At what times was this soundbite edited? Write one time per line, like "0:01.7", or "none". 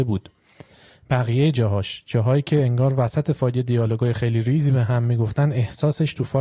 none